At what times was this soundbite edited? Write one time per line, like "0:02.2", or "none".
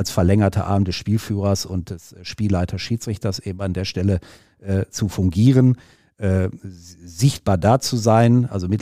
none